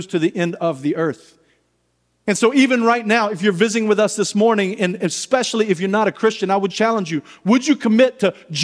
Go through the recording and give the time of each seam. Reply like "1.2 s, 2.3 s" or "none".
6.7 s